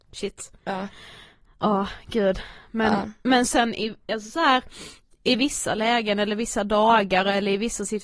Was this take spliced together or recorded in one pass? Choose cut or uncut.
uncut